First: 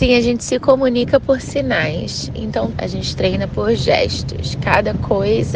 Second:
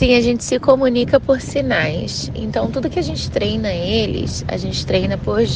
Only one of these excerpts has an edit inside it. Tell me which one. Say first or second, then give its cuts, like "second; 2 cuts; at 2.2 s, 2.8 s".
first; 1 cut; at 2.7 s